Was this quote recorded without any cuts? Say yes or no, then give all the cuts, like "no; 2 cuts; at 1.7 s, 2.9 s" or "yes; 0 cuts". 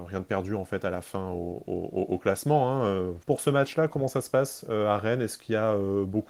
no; 1 cut; at 3.2 s